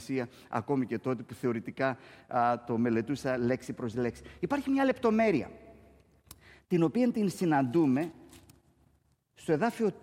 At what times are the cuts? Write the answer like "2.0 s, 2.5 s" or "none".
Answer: none